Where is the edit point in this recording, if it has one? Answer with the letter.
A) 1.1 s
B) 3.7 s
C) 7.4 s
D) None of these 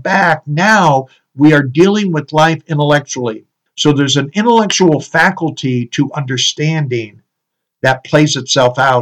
B